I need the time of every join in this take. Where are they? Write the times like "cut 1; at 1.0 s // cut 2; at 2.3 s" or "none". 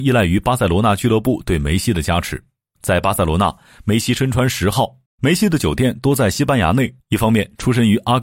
cut 1; at 5.1 s // cut 2; at 7.0 s